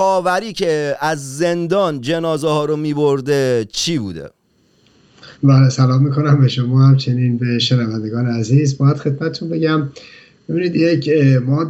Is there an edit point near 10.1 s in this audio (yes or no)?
no